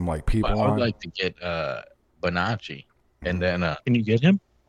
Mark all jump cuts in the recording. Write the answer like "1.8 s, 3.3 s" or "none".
3.2 s